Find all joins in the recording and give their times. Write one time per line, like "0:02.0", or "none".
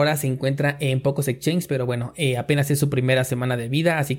none